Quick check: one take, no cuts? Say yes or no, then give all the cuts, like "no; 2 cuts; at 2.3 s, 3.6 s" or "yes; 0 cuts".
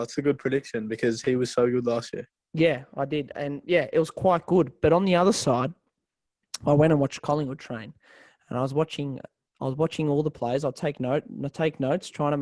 yes; 0 cuts